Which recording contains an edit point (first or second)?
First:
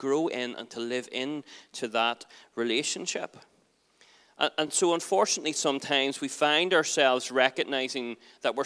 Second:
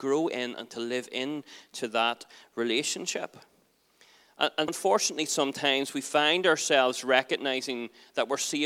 second